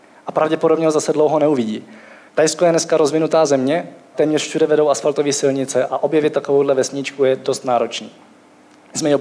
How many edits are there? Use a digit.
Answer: 1